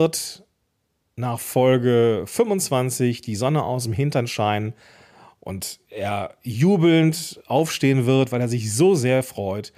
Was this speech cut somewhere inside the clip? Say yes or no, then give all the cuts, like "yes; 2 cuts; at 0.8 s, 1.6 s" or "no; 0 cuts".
no; 0 cuts